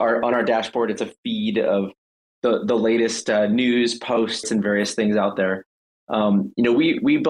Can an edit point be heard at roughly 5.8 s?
no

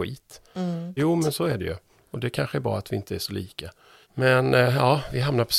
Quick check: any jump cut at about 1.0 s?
yes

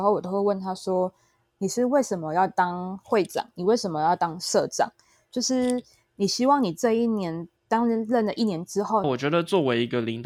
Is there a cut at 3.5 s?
no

